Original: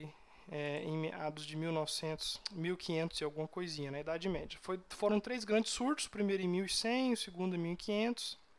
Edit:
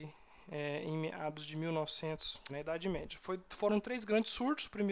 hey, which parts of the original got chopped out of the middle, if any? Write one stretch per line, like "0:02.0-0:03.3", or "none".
0:02.5-0:03.9